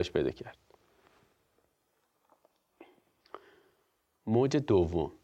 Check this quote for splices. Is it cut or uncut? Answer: uncut